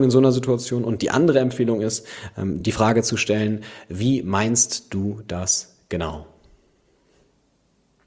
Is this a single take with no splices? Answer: yes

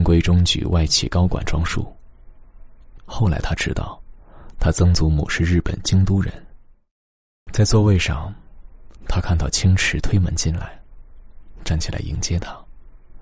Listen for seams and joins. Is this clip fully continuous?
no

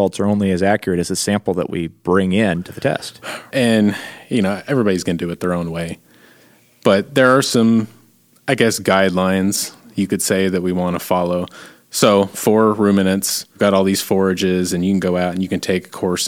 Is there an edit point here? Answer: yes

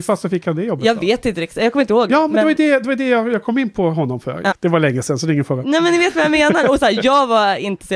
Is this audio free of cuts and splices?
no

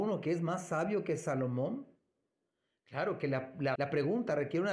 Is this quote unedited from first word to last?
no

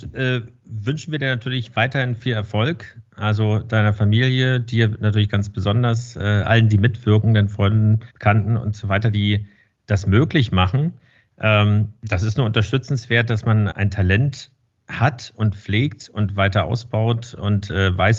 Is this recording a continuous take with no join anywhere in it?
no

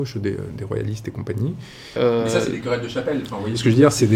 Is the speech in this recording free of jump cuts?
no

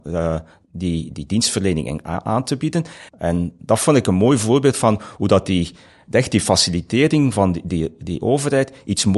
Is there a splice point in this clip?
yes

